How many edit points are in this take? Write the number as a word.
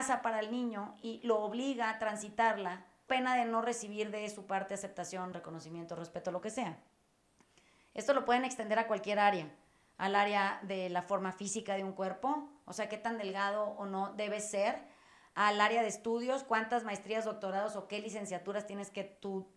two